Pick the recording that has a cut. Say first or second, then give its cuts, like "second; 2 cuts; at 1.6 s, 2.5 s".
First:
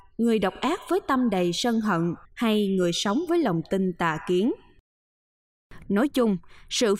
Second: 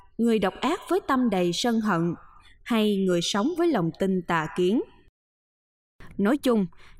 first; 1 cut; at 2.3 s